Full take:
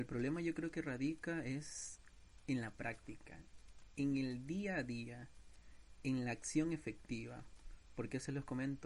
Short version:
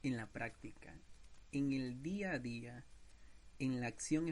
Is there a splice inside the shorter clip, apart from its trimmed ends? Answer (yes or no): no